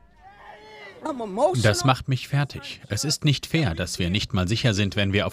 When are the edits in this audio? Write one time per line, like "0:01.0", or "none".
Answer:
none